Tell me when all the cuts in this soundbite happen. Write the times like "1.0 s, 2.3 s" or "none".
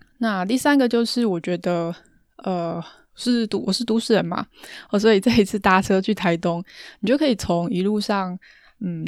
none